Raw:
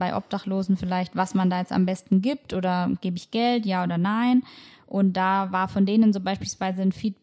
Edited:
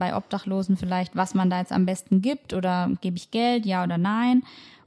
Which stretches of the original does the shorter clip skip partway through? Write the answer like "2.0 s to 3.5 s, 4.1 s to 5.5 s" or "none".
none